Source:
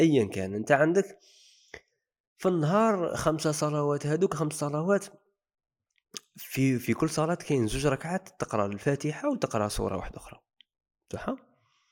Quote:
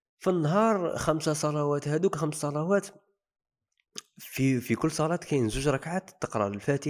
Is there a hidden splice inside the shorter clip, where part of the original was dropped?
no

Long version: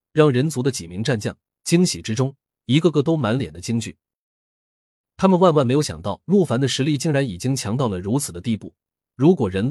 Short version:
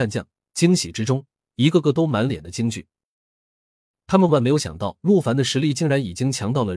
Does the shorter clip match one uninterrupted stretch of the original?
no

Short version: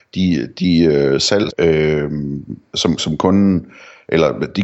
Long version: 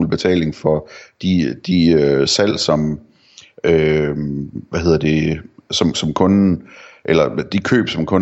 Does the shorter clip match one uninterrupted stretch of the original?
no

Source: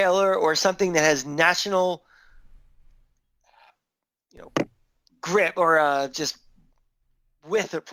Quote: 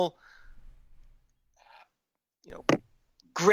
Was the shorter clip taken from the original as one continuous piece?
yes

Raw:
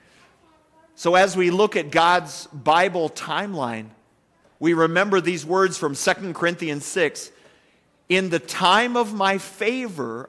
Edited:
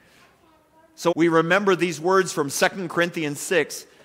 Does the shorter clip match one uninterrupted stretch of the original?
no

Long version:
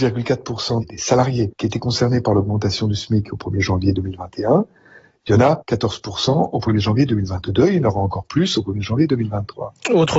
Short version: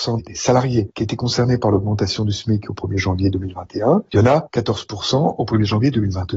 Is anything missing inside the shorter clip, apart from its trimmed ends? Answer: yes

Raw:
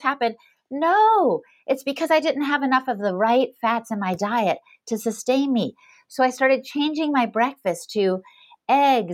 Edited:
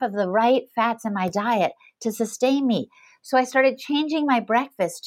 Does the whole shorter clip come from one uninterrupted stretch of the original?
yes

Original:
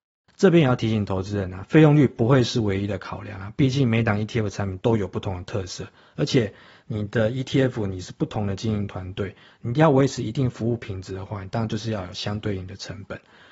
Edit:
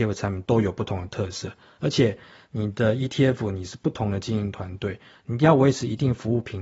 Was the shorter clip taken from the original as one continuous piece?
yes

